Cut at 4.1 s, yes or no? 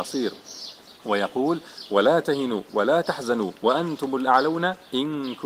no